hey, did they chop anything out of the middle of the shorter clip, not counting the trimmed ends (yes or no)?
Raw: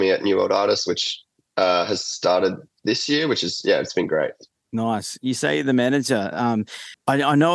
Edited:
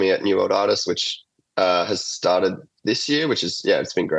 no